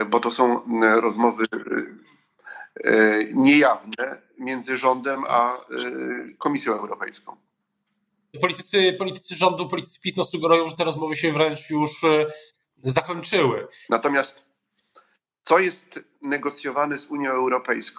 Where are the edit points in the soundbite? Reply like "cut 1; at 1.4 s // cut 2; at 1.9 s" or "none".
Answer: cut 1; at 13.9 s